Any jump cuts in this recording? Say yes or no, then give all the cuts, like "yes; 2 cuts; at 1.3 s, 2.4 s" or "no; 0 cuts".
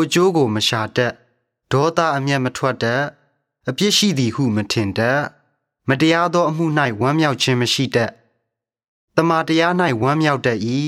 no; 0 cuts